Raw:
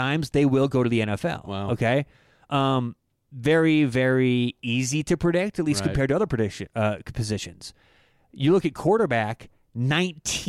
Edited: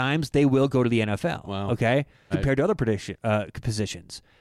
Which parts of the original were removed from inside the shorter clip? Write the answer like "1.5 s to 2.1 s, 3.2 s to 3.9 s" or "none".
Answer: 2.3 s to 5.8 s